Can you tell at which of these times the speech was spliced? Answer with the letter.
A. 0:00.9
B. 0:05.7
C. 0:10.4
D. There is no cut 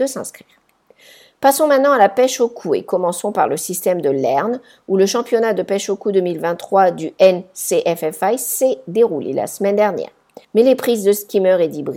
C